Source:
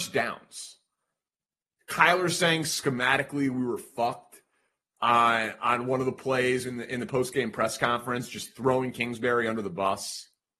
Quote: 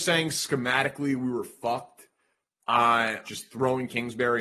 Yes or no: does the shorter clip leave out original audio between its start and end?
yes